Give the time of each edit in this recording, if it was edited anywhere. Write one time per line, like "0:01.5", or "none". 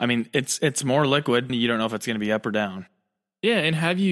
0:01.5